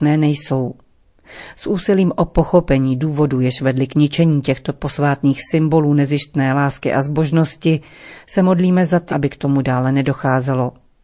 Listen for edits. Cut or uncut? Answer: cut